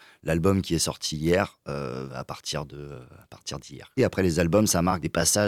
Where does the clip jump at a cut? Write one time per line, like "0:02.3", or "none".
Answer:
0:02.1
0:04.0